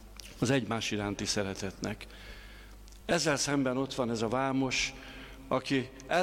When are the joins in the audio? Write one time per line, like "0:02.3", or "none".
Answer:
none